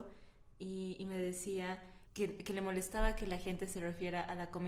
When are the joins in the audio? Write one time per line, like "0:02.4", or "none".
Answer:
0:02.1